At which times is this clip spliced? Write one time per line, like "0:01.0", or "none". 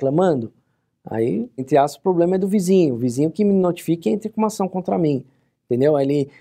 0:01.6